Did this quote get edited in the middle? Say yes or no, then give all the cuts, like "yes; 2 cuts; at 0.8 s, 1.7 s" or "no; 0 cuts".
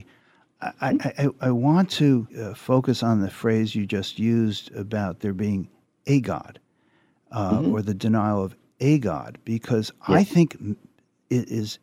yes; 1 cut; at 2.3 s